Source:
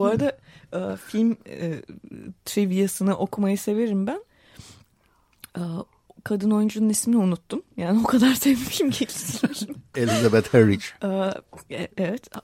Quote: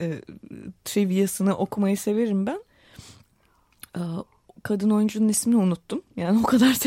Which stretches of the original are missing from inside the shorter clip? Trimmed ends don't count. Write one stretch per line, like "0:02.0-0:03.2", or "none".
none